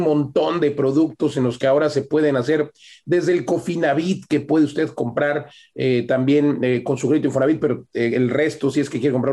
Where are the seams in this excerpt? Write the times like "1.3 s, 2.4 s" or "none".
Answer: none